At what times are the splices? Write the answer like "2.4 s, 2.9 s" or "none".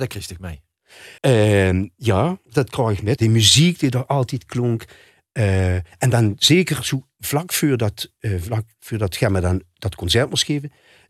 1.2 s, 3.2 s